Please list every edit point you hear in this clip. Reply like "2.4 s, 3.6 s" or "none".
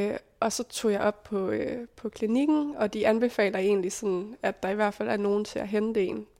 none